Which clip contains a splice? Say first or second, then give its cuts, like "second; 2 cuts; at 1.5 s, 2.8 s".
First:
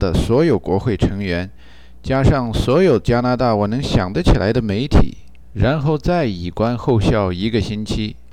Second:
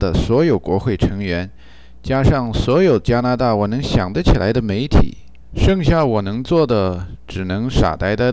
second; 1 cut; at 5.5 s